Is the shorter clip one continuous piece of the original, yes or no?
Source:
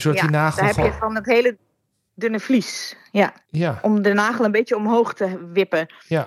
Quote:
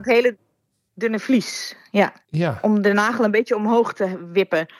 yes